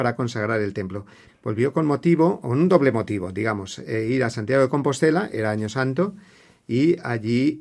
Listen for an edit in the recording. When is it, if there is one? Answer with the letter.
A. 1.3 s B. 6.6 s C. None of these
A